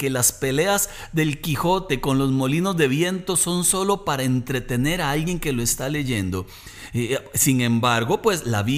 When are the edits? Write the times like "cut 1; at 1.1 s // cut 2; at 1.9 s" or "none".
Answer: none

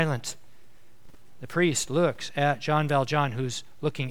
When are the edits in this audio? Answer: none

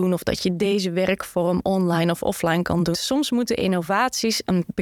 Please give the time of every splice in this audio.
cut 1; at 2.9 s

